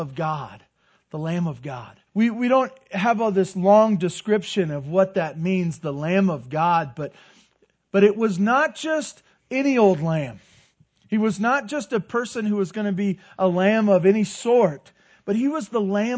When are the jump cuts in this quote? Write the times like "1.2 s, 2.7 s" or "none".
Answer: 2.1 s